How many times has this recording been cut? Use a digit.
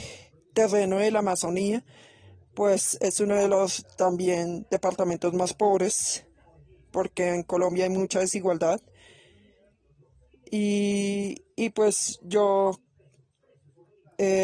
0